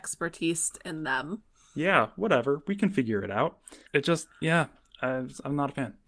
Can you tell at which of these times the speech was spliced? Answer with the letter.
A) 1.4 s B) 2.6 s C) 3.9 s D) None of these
C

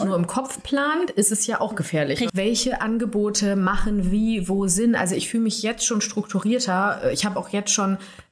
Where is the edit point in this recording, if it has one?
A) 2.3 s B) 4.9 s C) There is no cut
A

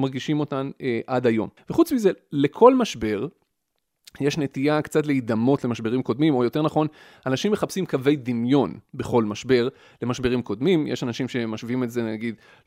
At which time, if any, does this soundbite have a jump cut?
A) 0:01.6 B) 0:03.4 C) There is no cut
A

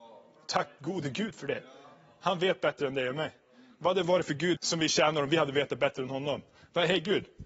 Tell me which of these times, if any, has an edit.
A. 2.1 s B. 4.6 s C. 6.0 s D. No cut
B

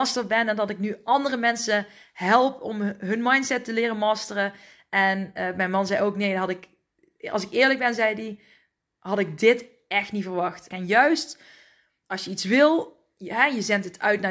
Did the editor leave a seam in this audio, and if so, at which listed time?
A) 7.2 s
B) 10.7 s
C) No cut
B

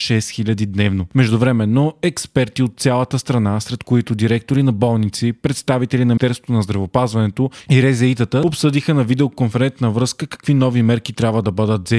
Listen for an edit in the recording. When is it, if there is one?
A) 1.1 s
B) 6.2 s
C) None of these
B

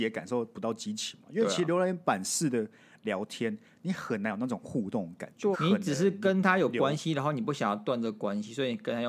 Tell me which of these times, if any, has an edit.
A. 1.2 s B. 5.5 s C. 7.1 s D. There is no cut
B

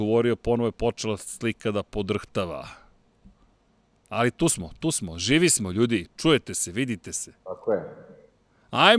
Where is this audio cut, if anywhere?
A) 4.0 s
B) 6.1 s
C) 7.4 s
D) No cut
C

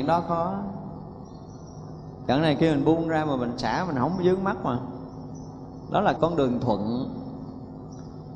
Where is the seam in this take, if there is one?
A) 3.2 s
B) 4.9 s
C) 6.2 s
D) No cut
C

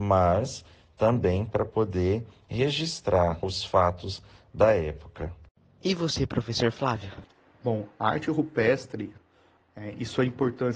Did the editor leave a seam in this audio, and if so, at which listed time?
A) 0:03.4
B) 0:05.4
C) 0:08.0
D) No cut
A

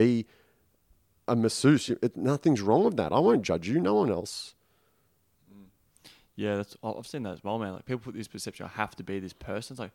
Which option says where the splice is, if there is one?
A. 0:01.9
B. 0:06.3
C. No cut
C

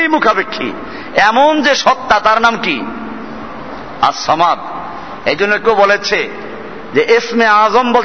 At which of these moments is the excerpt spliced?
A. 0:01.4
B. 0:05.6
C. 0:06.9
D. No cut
B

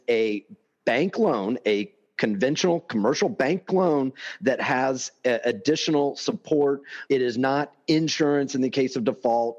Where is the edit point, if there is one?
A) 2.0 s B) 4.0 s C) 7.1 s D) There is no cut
C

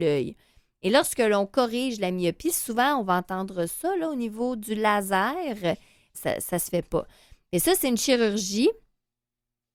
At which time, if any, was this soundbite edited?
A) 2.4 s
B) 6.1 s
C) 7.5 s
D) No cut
B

